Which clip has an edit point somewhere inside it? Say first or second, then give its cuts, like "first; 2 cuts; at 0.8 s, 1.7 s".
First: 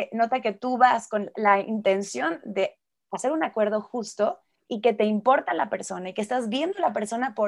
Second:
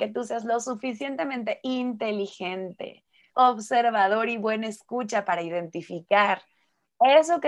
second; 1 cut; at 3.3 s